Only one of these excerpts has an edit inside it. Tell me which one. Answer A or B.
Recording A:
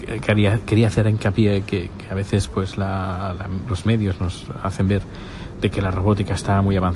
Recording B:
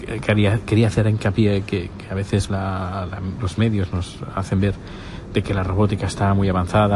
B